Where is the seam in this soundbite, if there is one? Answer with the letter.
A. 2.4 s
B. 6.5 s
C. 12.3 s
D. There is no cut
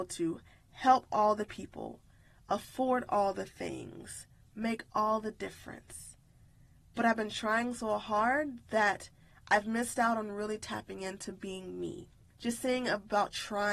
C